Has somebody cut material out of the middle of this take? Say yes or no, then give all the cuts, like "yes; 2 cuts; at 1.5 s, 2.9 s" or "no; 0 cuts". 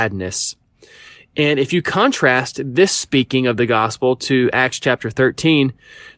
no; 0 cuts